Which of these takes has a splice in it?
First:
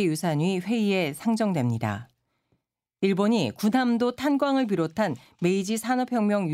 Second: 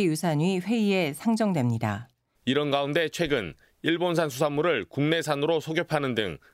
second; 1 cut; at 2.3 s

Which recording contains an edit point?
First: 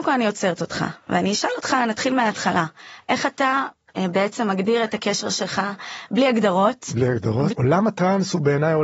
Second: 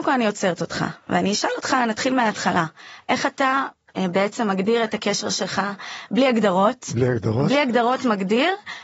first; 1 cut; at 7.5 s

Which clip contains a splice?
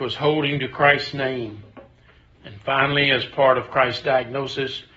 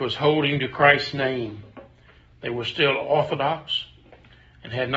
first; 1 cut; at 2.3 s

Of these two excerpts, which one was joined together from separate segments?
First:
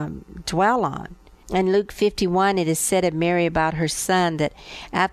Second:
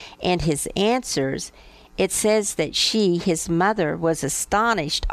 first; 1 cut; at 1.4 s

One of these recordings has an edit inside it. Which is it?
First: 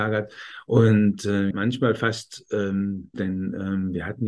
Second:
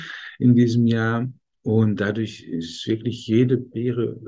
first; 2 cuts; at 1.5 s, 3.1 s

